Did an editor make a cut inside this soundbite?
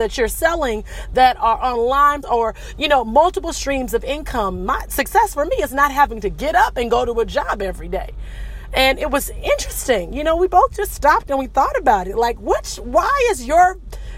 yes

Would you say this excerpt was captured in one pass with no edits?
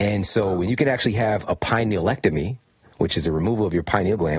yes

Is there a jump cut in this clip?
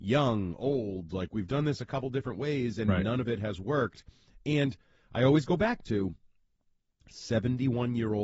no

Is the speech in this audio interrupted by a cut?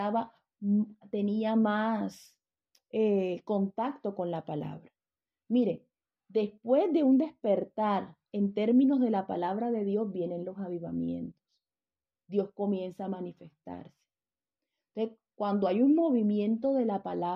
no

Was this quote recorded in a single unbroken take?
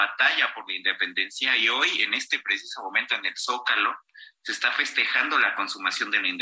yes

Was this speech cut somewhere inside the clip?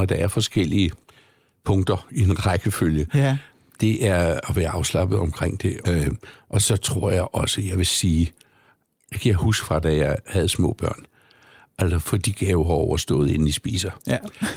yes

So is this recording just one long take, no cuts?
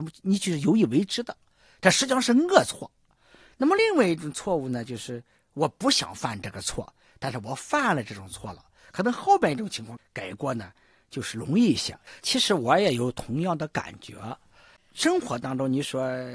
no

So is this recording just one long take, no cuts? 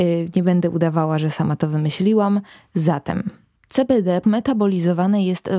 no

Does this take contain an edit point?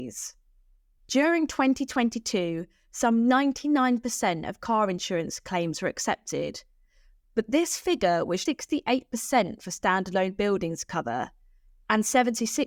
yes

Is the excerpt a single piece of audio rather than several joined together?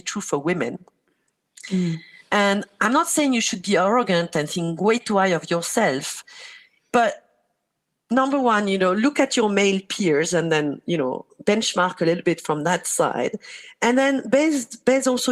yes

